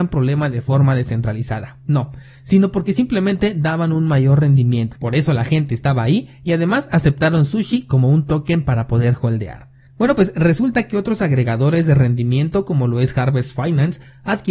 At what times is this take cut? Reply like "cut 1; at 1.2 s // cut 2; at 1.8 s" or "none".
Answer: cut 1; at 4.9 s // cut 2; at 9.9 s

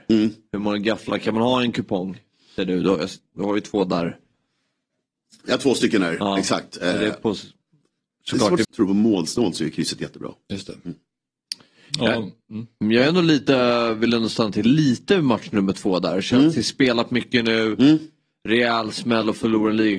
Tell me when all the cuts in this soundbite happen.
cut 1; at 8.6 s

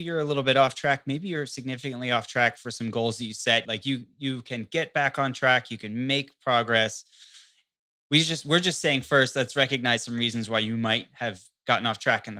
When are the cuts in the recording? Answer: cut 1; at 3.6 s

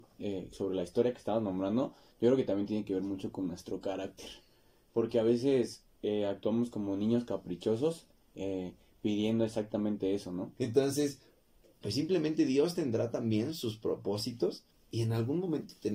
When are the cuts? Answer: cut 1; at 10.6 s // cut 2; at 14.7 s

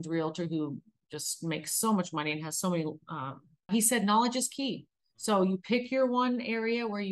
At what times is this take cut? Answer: cut 1; at 3.7 s

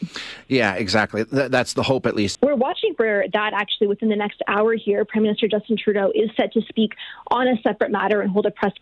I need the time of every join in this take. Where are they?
cut 1; at 2.3 s

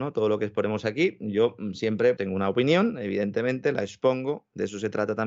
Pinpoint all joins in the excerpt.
cut 1; at 2.2 s

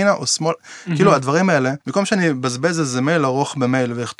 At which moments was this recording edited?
cut 1; at 1.8 s

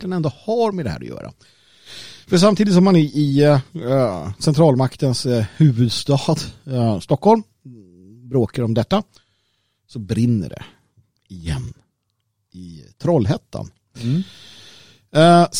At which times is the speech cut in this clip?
none

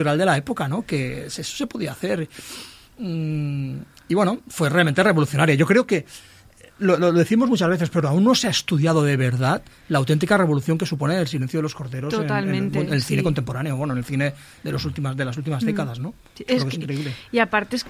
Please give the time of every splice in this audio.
none

